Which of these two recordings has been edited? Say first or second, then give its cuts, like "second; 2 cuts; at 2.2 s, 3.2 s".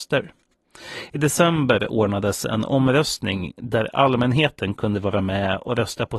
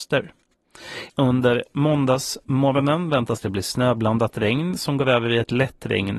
second; 1 cut; at 1.1 s